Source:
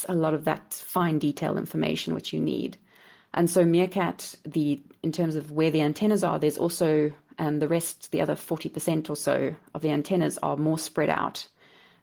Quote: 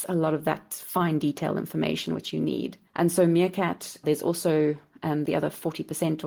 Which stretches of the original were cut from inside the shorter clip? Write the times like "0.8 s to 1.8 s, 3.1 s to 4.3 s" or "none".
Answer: 2.9 s to 3.2 s, 4.4 s to 6.4 s, 7.6 s to 8.1 s